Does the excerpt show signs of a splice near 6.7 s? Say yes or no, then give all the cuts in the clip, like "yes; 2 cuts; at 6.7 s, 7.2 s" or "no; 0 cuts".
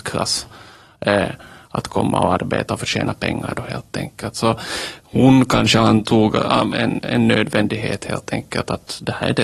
yes; 1 cut; at 6.7 s